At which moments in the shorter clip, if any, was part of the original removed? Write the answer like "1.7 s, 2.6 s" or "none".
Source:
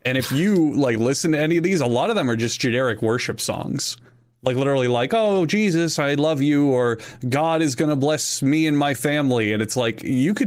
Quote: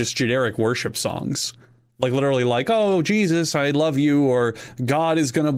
none